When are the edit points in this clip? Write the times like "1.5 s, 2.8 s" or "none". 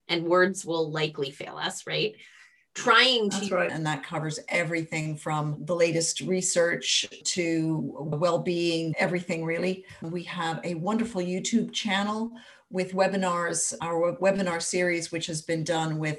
3.7 s, 8.9 s, 10.0 s